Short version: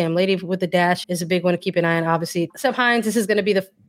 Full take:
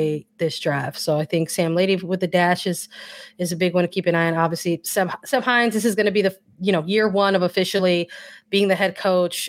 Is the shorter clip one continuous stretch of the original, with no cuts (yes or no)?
no